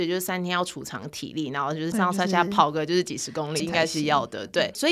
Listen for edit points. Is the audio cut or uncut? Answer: cut